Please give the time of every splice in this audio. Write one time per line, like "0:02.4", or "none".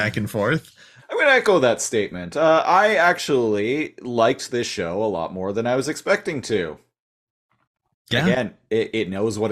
0:01.0